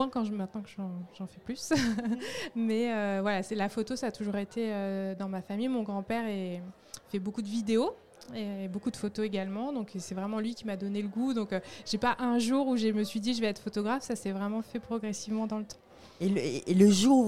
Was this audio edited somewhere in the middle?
no; 0 cuts

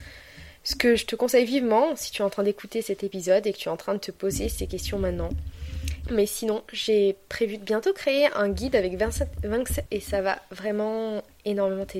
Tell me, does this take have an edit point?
yes; 2 cuts; at 6.0 s, 9.9 s

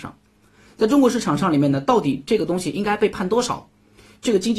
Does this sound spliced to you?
no; 0 cuts

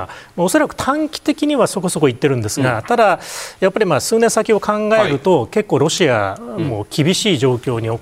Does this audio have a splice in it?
no; 0 cuts

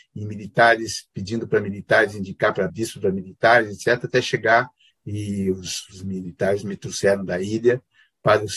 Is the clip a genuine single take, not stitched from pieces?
no; 2 cuts; at 2.7 s, 4.9 s

